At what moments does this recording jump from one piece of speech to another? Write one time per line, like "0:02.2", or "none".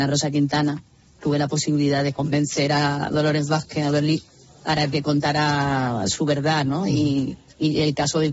0:01.2